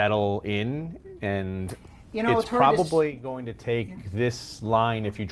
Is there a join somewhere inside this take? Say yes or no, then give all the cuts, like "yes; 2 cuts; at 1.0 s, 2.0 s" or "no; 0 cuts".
no; 0 cuts